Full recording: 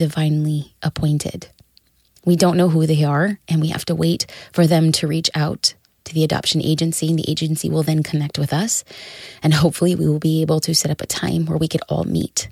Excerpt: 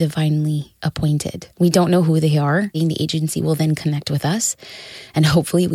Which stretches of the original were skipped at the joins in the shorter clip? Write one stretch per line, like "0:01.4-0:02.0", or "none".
0:01.5-0:02.2
0:03.4-0:07.0